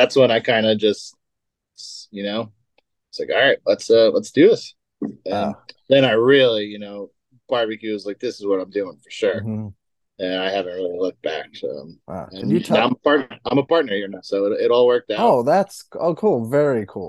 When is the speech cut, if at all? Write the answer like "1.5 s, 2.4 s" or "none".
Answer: none